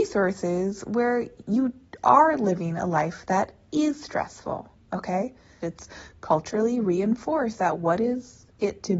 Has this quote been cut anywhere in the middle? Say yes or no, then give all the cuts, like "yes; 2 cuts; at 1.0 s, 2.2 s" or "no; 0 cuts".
yes; 1 cut; at 5.6 s